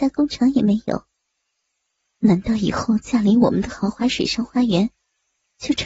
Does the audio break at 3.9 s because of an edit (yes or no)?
no